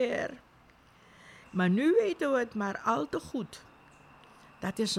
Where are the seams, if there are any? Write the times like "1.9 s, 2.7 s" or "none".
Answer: 1.4 s